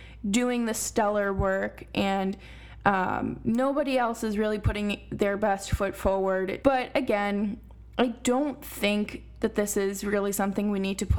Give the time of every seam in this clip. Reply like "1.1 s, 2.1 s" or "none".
6.6 s